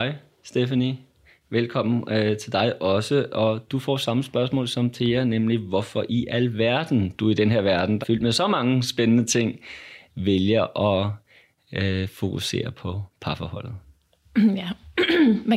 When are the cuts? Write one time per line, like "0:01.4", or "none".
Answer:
0:08.0